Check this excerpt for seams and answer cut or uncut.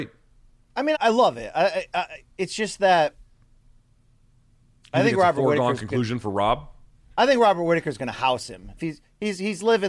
cut